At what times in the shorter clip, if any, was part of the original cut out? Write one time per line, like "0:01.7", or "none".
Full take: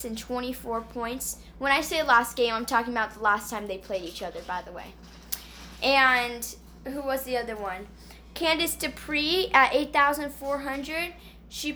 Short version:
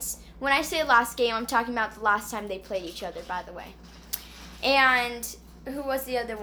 none